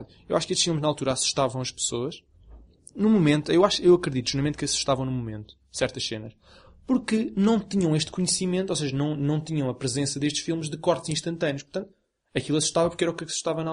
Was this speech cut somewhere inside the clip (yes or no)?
no